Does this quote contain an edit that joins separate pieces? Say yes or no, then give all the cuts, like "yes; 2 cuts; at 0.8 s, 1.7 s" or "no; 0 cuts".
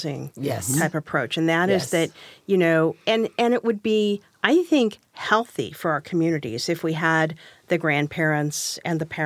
no; 0 cuts